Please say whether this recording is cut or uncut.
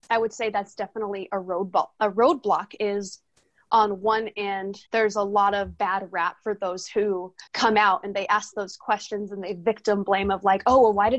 cut